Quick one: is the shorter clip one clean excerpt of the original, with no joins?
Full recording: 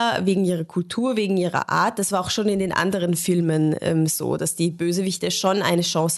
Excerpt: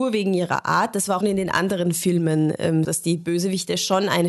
no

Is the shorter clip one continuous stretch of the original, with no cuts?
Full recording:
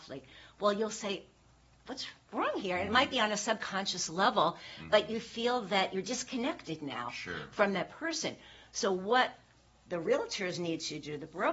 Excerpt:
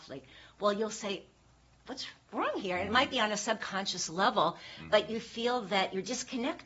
yes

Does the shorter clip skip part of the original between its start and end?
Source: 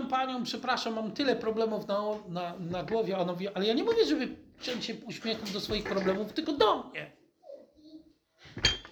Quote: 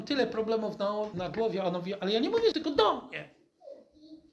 yes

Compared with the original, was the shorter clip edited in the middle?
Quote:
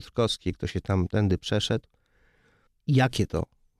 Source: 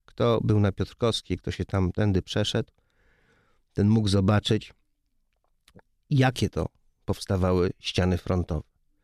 yes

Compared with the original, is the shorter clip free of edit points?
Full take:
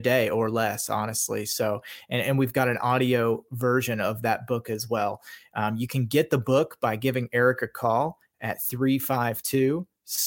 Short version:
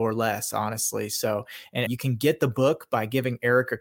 no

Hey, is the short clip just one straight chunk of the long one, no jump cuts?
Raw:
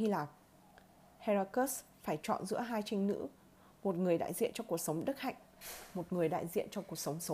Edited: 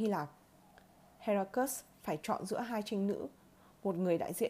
yes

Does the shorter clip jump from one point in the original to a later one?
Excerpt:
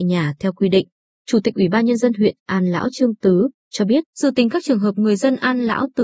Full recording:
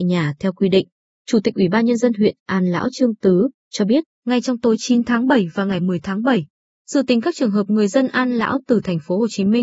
yes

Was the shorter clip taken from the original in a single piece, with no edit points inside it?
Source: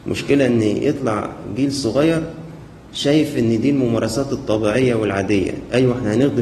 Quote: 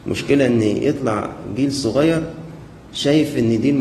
yes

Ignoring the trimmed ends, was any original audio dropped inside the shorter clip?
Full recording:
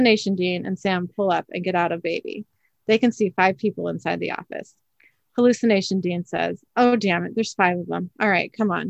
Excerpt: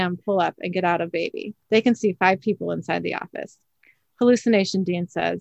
yes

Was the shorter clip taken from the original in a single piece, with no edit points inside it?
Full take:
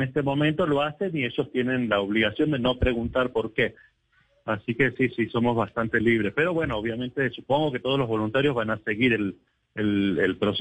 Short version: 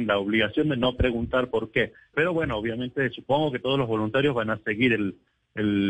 no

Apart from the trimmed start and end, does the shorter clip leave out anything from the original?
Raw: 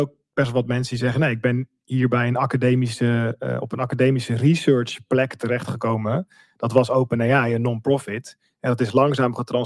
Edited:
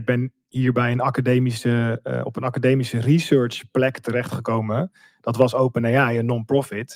no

